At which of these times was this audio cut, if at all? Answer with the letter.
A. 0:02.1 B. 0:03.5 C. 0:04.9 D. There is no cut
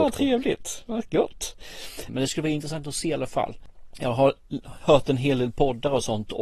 A